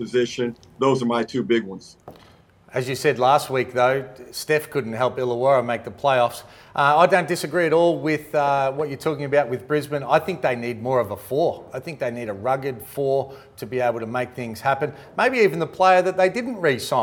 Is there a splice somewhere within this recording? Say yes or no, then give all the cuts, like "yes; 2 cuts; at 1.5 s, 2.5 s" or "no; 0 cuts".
no; 0 cuts